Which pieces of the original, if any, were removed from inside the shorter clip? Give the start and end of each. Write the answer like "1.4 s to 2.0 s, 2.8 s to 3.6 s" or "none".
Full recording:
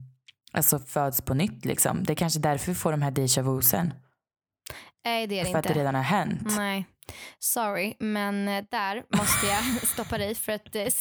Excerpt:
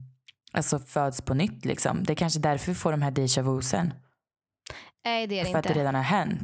none